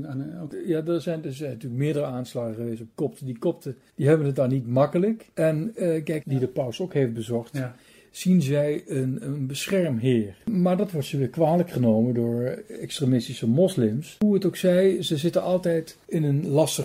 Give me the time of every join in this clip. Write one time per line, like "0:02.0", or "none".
0:06.2